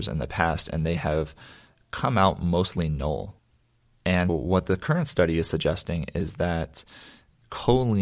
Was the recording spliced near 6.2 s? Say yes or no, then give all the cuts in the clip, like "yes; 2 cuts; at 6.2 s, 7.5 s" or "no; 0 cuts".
no; 1 cut; at 4.3 s